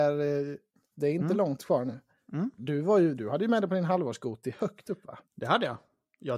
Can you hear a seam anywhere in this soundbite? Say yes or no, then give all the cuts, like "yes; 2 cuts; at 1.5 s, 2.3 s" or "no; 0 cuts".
yes; 2 cuts; at 0.9 s, 2.6 s